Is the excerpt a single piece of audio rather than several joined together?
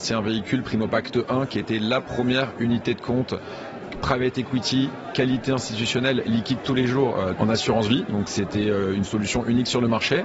no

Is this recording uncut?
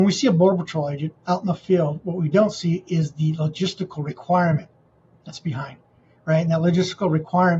no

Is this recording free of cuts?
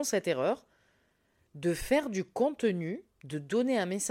no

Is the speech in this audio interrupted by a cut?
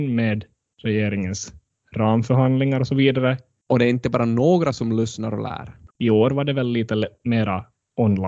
yes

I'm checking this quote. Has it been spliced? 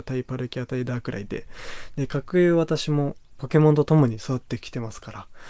no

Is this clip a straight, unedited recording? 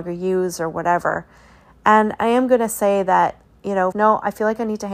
no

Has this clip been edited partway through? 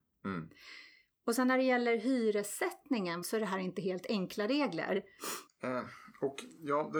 yes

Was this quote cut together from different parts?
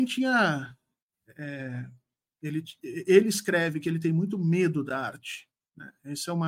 no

